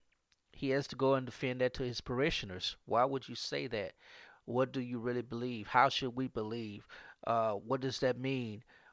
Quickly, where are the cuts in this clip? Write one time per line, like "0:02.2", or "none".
none